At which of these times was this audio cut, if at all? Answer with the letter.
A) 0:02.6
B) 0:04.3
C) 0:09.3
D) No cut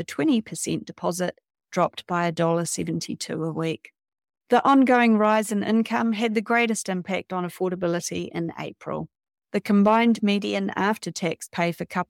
B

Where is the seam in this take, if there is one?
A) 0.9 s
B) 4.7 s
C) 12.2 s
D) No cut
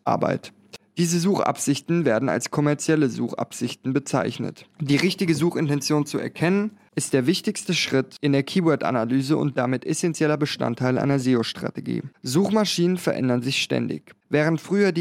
B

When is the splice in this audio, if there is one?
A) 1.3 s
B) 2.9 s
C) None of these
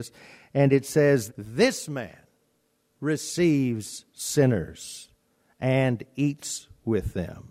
A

